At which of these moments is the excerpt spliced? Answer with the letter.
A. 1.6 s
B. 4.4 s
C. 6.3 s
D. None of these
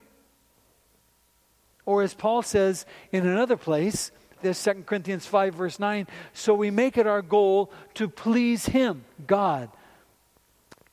B